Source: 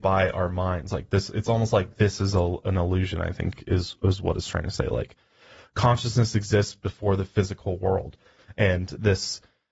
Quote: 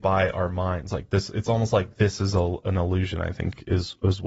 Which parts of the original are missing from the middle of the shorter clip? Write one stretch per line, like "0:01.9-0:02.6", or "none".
none